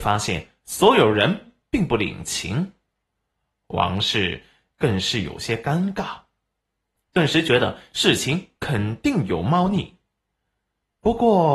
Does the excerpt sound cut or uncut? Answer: uncut